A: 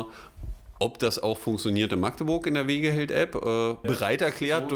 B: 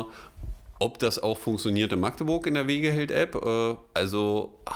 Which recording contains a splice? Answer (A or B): A